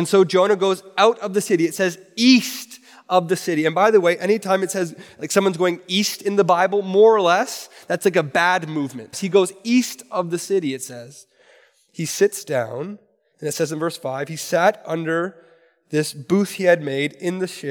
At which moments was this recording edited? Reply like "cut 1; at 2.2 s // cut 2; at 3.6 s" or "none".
cut 1; at 9.1 s